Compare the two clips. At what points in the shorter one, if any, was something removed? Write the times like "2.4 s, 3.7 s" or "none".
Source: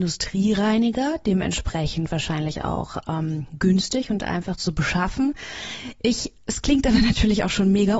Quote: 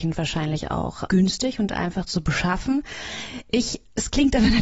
1.1 s